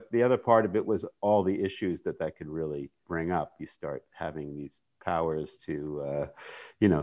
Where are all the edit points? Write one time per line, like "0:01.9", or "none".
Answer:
0:03.0